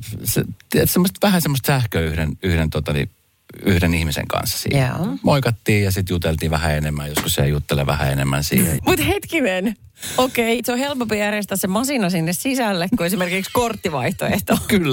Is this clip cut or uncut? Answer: cut